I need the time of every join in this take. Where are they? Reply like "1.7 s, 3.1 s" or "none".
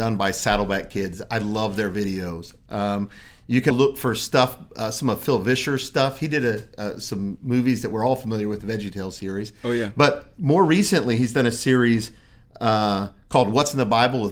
3.7 s